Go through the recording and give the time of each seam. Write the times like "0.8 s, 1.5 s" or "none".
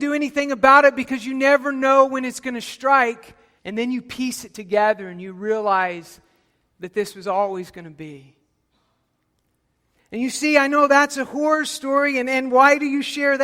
3.6 s